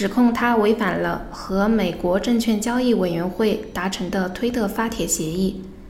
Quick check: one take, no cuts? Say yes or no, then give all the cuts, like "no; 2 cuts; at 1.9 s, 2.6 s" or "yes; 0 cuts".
yes; 0 cuts